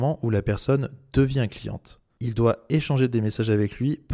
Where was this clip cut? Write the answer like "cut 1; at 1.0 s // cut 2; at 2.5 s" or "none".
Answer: cut 1; at 2.2 s